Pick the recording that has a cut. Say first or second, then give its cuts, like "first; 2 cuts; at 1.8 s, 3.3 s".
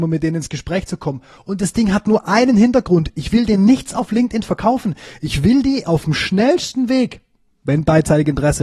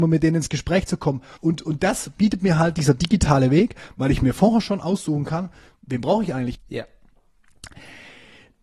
second; 2 cuts; at 1.4 s, 6.6 s